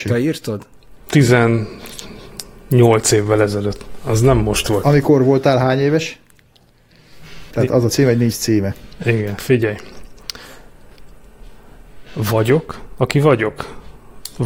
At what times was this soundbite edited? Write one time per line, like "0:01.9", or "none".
0:01.1
0:07.5